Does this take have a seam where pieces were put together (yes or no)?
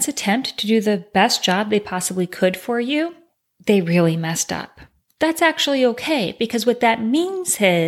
no